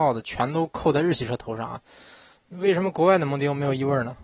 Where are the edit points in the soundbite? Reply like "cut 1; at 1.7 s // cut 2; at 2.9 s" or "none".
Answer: none